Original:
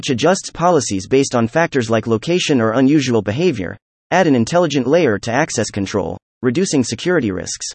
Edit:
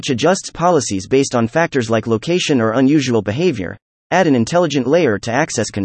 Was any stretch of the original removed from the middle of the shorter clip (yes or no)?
no